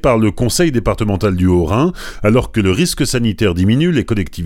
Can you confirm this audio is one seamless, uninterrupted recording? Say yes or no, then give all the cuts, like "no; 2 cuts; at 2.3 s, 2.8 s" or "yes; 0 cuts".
yes; 0 cuts